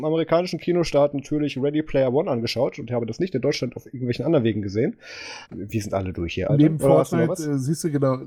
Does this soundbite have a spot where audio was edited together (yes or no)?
yes